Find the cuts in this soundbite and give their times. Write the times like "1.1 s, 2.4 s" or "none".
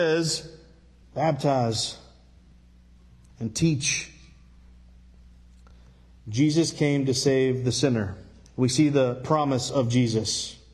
1.0 s, 8.5 s